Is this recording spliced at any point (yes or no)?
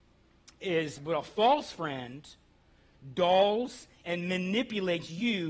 yes